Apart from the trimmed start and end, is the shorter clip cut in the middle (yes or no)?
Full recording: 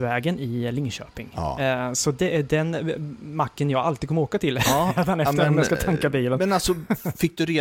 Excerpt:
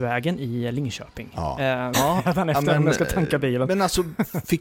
yes